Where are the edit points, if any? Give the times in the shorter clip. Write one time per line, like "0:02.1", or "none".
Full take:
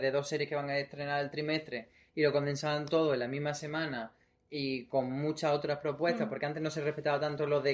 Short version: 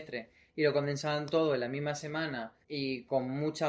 0:02.6